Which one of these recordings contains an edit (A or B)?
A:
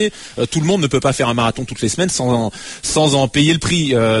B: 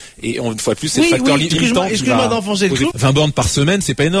B